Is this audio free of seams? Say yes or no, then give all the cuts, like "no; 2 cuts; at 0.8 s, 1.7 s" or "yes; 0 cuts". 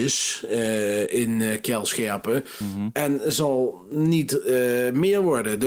yes; 0 cuts